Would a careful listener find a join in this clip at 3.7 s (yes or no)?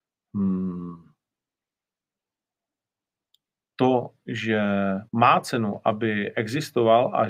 no